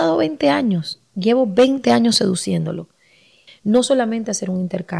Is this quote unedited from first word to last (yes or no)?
no